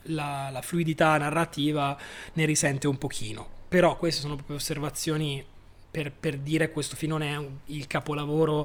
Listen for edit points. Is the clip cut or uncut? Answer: uncut